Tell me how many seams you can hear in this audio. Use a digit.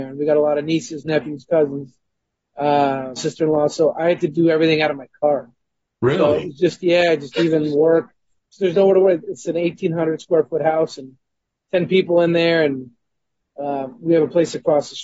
1